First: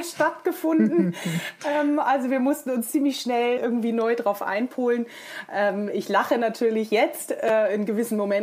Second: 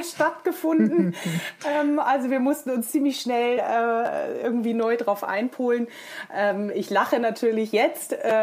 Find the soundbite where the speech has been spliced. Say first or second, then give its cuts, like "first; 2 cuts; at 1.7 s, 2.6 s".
first; 1 cut; at 3.6 s